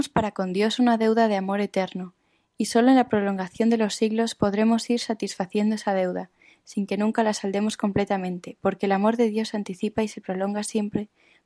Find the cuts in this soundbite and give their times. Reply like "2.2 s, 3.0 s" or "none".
none